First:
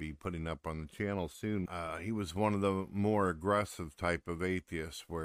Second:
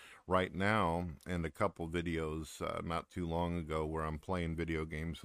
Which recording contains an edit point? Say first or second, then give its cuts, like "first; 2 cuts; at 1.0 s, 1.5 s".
first; 1 cut; at 1.7 s